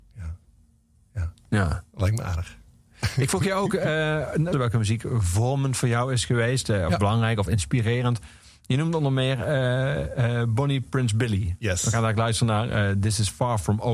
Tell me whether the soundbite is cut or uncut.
cut